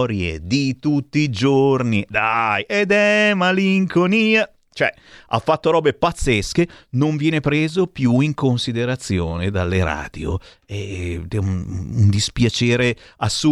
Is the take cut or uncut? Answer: uncut